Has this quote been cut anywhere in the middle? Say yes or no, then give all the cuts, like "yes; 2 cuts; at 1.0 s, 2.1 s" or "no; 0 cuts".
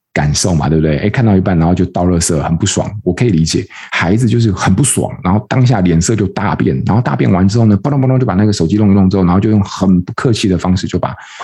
yes; 1 cut; at 3.9 s